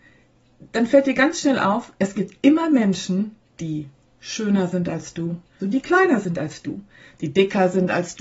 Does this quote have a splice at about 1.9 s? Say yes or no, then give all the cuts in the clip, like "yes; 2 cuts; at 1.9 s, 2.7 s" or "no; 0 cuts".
no; 1 cut; at 5.6 s